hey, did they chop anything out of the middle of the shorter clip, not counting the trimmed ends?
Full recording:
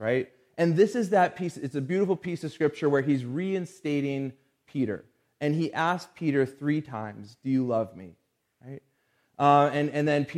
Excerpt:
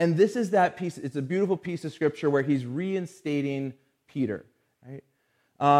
yes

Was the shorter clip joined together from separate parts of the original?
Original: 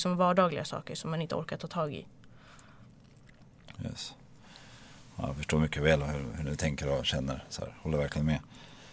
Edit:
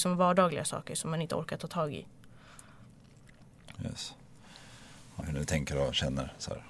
yes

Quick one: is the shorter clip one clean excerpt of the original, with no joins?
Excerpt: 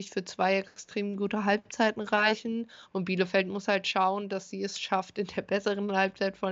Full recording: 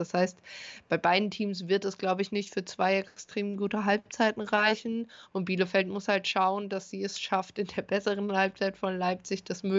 yes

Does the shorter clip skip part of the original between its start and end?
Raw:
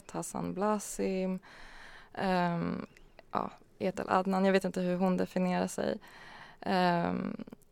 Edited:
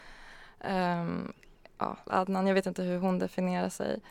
yes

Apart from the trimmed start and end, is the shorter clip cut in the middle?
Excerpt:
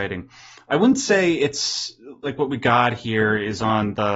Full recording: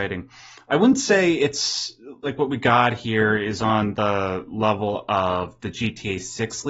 no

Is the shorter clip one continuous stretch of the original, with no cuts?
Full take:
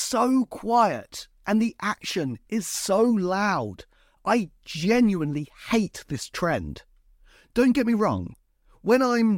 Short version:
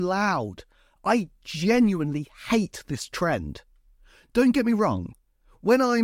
yes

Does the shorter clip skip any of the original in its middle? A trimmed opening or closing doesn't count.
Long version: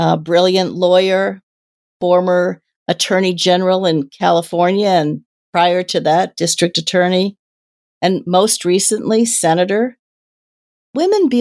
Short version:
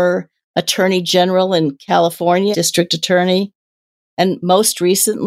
yes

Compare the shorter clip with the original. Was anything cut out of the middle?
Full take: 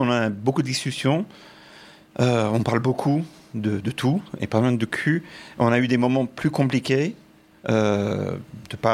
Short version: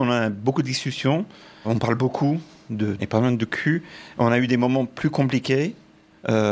yes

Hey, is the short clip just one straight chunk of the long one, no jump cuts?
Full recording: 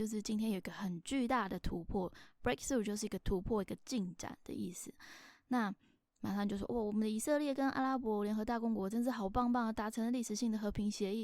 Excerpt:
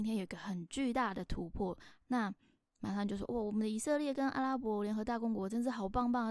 no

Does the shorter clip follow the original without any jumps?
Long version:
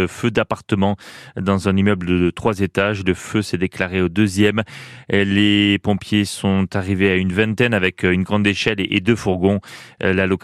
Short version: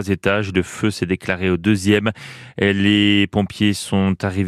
yes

